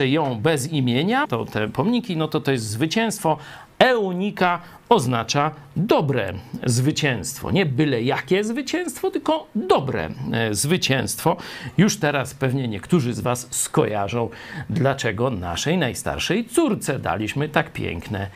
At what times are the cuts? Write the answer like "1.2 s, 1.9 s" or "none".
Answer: 1.2 s